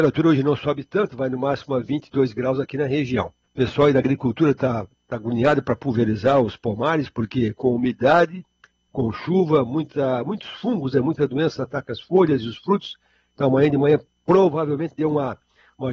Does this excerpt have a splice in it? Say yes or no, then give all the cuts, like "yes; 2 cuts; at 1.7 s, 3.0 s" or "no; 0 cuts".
yes; 1 cut; at 3.4 s